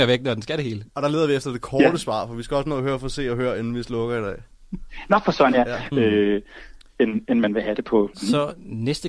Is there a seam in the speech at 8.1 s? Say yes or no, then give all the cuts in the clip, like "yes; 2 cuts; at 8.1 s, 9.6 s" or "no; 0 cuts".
yes; 2 cuts; at 5.9 s, 8.1 s